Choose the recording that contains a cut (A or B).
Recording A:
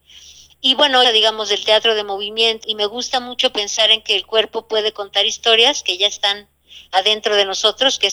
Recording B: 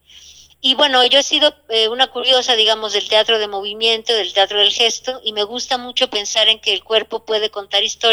A